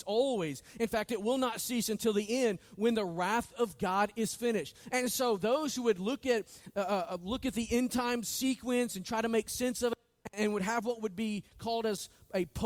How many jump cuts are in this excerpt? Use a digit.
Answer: 0